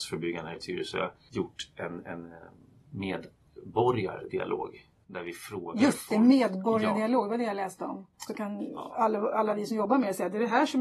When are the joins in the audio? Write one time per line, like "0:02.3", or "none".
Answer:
0:08.3